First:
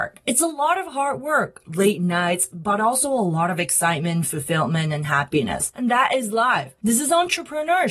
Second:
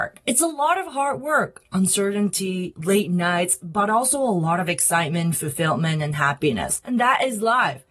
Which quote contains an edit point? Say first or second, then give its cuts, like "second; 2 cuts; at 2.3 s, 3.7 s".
first; 1 cut; at 1.6 s